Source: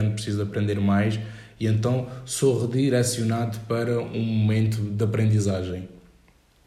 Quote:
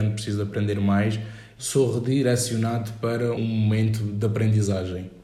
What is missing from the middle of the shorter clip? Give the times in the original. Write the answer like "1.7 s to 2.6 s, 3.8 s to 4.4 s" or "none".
1.6 s to 2.3 s, 4.0 s to 4.1 s